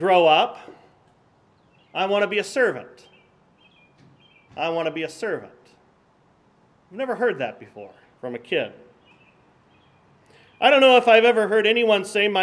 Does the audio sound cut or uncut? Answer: uncut